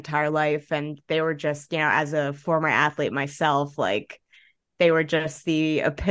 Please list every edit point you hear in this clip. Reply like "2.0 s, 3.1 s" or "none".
none